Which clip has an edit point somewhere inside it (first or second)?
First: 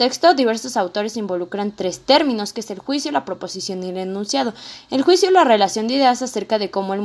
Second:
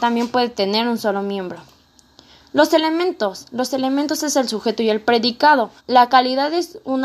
second